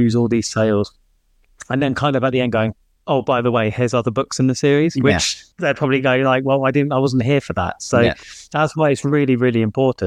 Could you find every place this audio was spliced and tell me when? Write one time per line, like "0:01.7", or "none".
0:05.5